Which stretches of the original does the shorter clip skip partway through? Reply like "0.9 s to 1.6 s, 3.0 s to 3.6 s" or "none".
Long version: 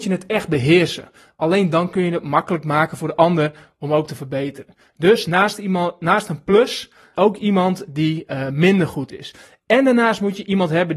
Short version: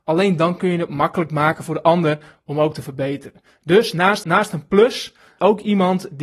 5.6 s to 6.0 s